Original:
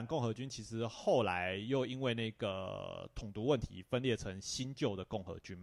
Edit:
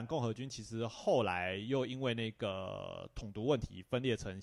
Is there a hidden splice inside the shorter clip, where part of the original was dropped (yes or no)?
no